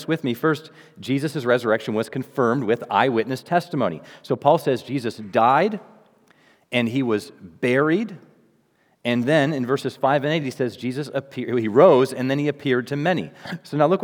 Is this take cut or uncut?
uncut